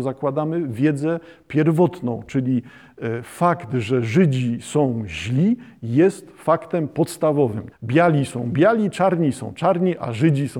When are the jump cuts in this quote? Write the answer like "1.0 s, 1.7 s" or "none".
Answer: 7.7 s